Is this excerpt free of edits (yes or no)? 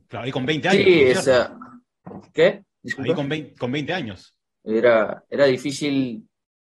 no